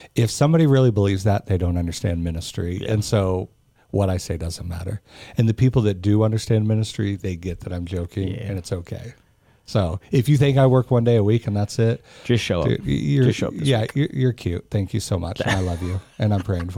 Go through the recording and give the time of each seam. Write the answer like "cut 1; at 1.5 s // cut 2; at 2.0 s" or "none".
none